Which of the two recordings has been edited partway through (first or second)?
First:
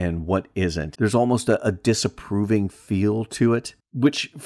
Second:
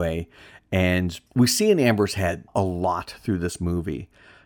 first